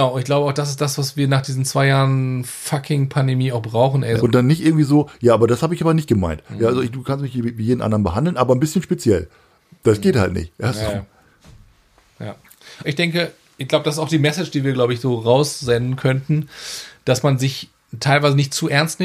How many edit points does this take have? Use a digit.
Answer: 2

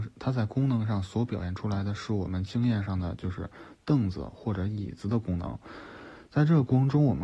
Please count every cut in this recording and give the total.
0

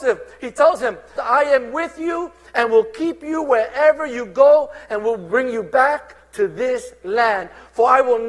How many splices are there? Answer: 1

